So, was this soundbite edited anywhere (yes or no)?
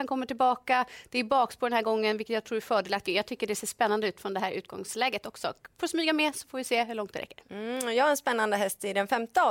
yes